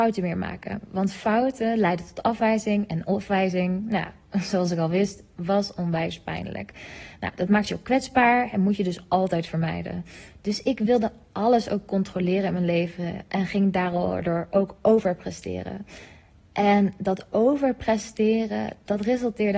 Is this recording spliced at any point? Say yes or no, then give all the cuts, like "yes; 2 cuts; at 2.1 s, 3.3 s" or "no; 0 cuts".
no; 0 cuts